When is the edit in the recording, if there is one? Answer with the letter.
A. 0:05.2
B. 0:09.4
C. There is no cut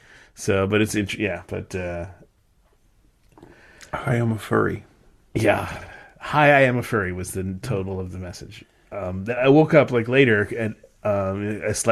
B